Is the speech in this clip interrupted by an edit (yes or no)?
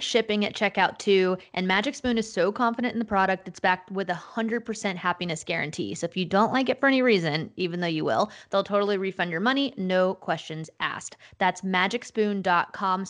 no